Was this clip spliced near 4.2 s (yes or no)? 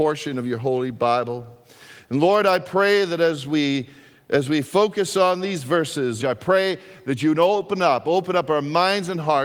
no